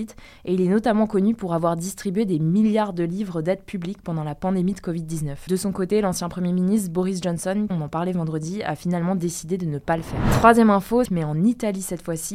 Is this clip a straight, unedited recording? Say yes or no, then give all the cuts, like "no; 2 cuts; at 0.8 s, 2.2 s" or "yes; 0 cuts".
no; 3 cuts; at 5.5 s, 7.7 s, 11.0 s